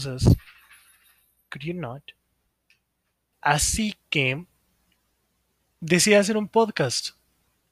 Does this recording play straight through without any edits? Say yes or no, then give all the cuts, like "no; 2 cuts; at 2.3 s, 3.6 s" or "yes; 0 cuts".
no; 1 cut; at 3.3 s